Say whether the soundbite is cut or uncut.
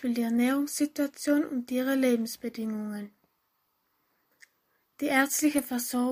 uncut